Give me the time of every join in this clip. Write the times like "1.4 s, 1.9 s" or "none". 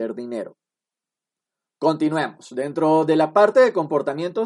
none

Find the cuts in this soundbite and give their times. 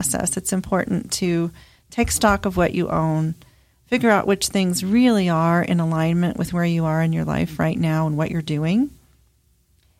none

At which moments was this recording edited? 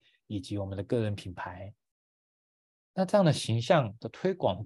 none

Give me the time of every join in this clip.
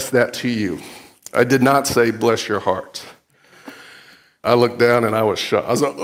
4.4 s

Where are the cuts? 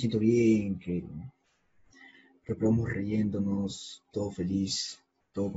none

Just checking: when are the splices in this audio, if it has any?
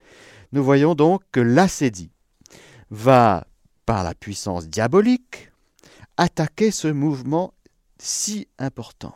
none

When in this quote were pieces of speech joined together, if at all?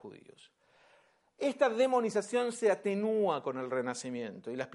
none

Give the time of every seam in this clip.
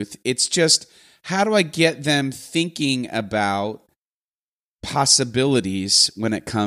none

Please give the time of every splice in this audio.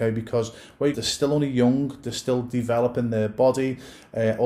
0.9 s

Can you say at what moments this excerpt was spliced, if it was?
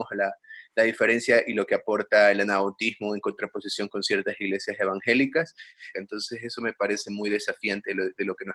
5.9 s

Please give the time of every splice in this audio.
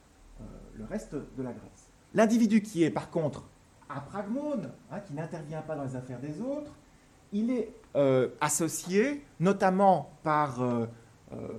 2.0 s

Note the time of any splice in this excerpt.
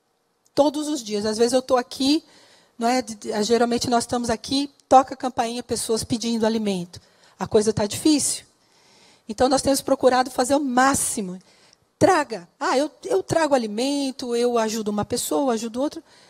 12.5 s

